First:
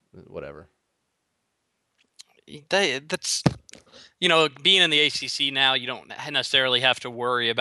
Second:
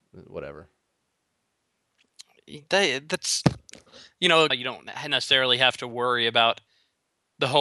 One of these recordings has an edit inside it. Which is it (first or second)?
second